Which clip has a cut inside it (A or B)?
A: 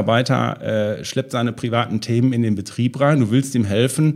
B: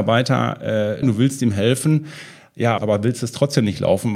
B